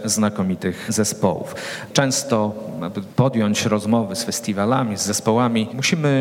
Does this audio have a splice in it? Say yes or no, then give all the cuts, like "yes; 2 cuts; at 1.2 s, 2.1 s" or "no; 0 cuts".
yes; 1 cut; at 1.9 s